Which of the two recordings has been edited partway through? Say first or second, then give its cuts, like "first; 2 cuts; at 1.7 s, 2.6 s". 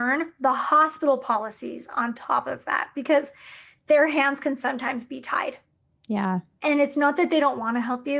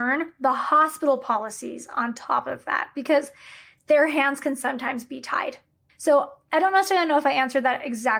second; 1 cut; at 5.9 s